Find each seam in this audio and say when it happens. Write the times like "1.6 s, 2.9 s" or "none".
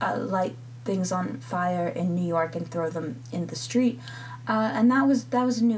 none